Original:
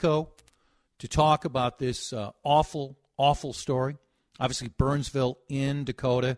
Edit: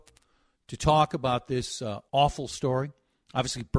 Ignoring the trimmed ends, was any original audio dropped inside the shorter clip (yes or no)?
yes